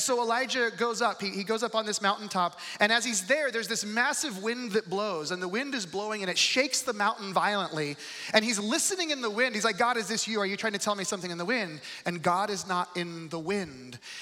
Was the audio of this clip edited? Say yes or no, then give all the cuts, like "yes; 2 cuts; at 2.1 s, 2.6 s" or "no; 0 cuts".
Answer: no; 0 cuts